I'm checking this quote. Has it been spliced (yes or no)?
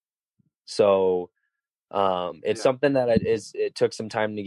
no